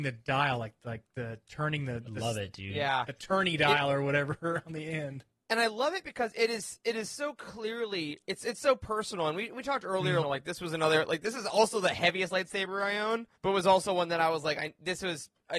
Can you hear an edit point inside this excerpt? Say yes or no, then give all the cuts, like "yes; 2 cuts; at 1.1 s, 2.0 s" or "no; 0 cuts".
yes; 2 cuts; at 10.2 s, 13.4 s